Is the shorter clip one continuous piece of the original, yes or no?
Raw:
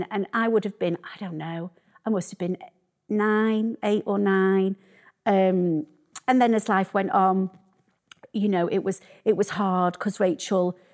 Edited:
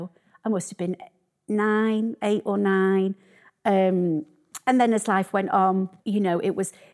no